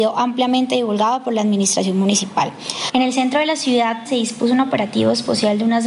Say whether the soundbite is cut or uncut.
cut